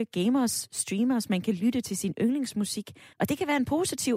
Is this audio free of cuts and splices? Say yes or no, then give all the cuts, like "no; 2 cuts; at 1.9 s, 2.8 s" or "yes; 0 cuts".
no; 1 cut; at 3.1 s